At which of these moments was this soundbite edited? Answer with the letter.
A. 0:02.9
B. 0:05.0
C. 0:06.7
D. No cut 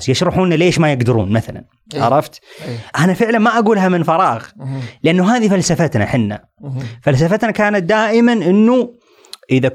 A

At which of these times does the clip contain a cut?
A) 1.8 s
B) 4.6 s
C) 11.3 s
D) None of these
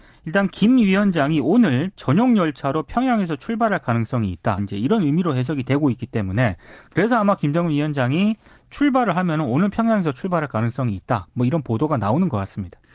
B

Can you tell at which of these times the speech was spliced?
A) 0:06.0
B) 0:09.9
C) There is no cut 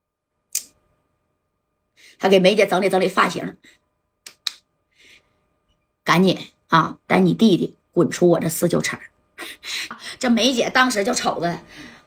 B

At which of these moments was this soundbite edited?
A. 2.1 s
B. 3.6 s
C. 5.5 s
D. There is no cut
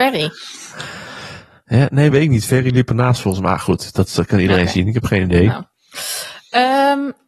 A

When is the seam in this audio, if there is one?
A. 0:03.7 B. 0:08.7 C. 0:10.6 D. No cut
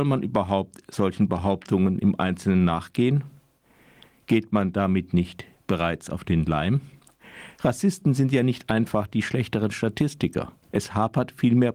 C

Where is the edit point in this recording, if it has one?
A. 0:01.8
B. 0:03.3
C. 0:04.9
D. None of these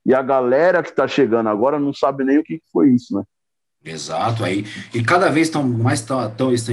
D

